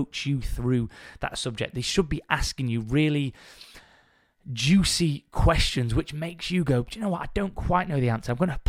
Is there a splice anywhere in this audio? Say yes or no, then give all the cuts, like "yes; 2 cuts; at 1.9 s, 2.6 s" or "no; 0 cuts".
no; 0 cuts